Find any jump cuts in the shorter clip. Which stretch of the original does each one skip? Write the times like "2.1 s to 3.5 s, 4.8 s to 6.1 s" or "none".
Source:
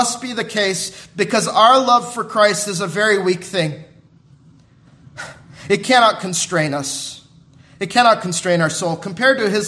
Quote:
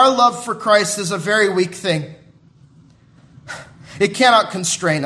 none